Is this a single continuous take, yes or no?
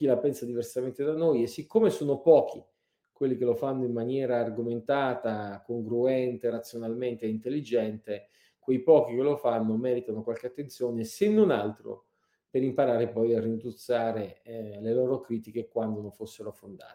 yes